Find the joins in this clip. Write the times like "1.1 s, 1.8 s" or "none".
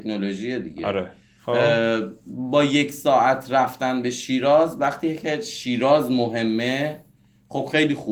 none